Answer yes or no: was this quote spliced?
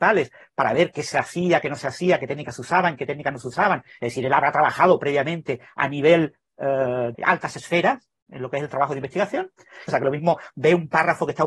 yes